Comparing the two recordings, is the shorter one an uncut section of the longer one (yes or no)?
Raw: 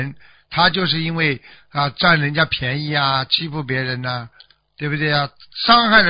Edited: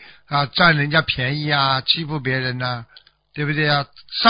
yes